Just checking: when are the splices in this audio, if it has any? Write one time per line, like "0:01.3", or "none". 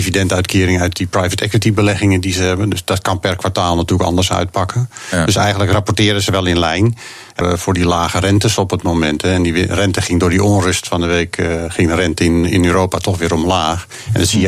0:07.4